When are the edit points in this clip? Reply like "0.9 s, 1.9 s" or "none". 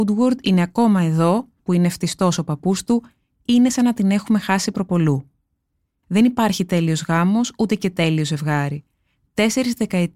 1.6 s, 6.0 s